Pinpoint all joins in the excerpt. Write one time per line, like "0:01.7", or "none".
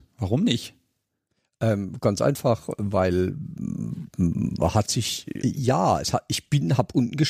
0:05.4